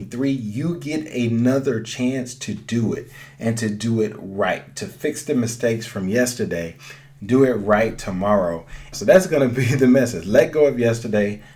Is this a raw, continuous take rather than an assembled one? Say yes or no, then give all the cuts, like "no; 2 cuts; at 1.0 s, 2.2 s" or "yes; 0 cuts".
no; 1 cut; at 8.9 s